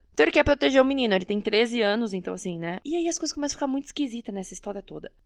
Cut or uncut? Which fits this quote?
cut